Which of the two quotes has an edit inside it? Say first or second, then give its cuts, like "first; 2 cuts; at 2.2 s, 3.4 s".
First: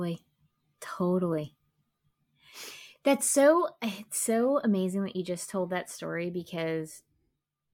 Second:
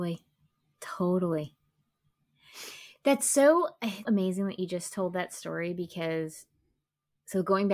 second; 1 cut; at 4.0 s